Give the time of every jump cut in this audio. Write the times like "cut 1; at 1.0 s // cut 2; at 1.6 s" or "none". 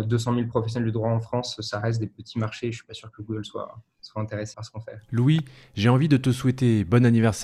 cut 1; at 4.5 s